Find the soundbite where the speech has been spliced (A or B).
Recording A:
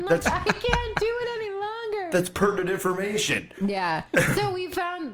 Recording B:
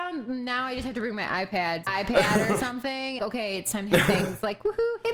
B